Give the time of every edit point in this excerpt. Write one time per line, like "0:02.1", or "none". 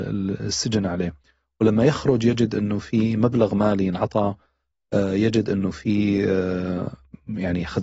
none